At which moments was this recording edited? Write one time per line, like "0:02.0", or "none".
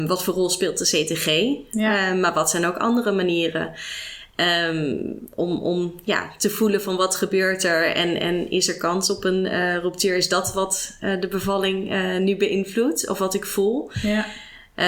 none